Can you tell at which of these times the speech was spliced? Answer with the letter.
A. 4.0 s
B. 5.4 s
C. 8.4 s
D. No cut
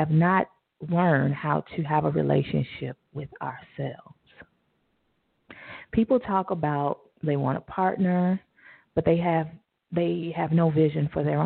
D